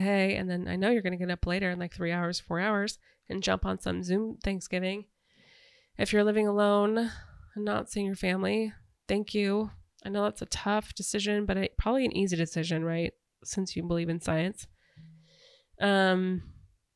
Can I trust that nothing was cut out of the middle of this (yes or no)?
yes